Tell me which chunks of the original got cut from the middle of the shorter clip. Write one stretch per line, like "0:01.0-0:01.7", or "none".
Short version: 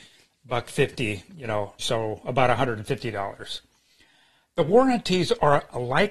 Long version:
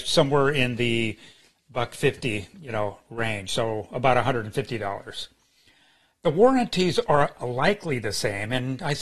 0:03.0-0:03.5